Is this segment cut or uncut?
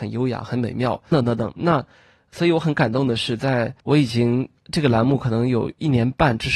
cut